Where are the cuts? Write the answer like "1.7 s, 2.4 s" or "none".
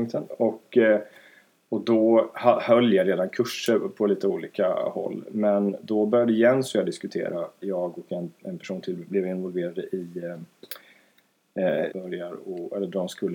7.6 s, 11.9 s